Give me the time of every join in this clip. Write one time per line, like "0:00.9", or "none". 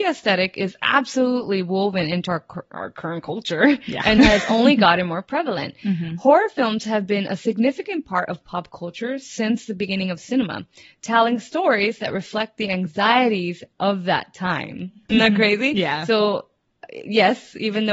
none